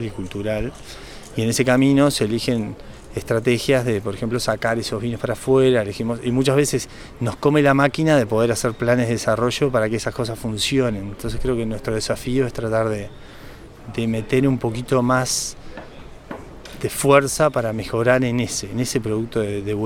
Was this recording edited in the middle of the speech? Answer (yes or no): no